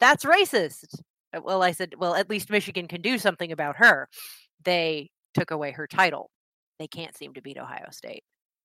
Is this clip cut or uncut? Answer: cut